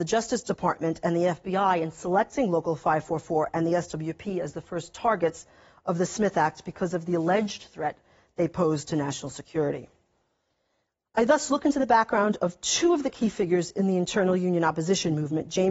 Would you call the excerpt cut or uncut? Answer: uncut